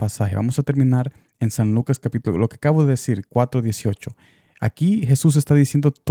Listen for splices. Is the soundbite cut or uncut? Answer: uncut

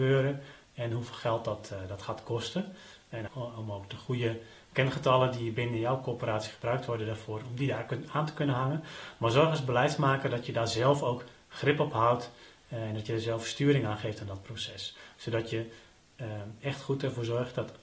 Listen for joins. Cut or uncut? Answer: cut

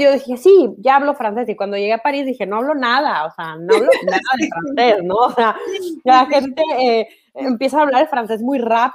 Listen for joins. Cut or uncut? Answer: uncut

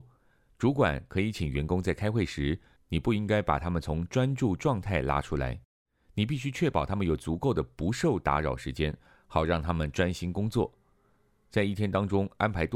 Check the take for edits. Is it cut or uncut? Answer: cut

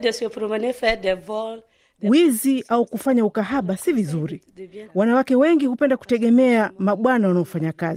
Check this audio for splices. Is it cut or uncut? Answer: cut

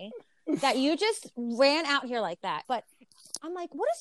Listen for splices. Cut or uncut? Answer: cut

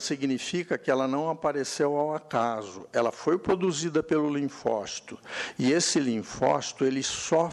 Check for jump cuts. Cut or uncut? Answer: uncut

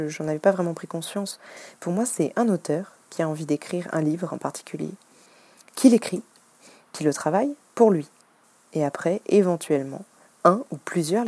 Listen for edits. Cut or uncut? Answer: uncut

